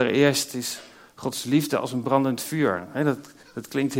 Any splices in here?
no; 0 cuts

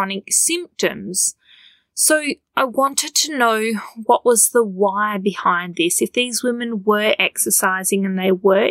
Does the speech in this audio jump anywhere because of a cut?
no; 0 cuts

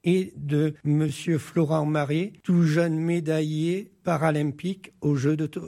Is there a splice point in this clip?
no; 0 cuts

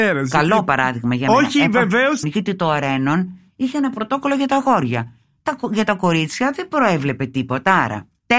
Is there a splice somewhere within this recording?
yes; 1 cut; at 2.2 s

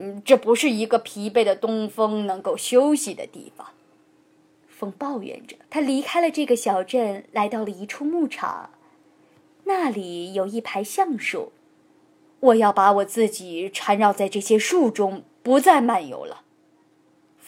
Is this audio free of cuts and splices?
no; 1 cut; at 5.7 s

